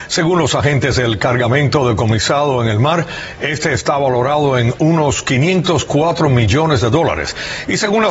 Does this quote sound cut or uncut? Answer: uncut